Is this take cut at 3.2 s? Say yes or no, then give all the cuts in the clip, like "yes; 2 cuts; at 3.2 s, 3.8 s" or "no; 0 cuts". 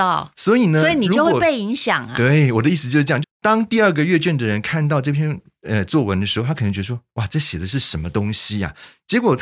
yes; 1 cut; at 3.2 s